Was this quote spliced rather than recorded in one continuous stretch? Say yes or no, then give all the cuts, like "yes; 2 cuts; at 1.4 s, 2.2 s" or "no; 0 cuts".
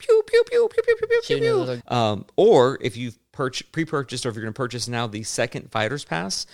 yes; 1 cut; at 1.8 s